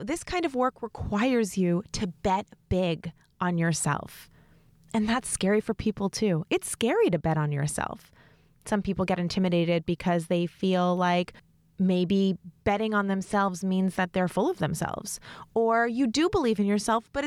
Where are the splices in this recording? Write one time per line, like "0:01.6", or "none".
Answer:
0:15.5